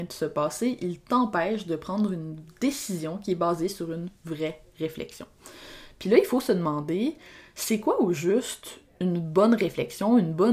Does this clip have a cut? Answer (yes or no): no